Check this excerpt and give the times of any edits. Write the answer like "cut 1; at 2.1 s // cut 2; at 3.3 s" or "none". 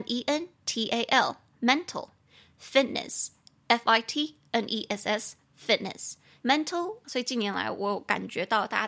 cut 1; at 7.0 s